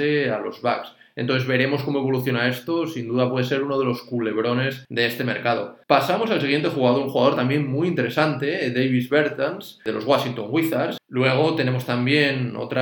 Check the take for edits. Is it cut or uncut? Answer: cut